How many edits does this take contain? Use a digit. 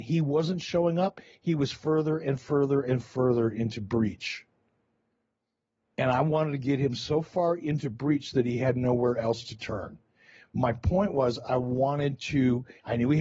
0